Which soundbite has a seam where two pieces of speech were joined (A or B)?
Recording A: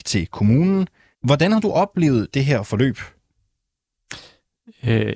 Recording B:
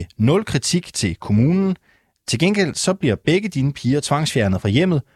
A